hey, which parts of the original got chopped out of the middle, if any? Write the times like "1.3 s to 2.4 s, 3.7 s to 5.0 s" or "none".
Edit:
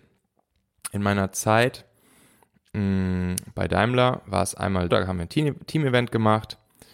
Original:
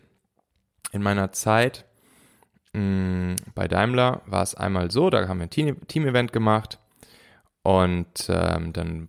4.9 s to 5.1 s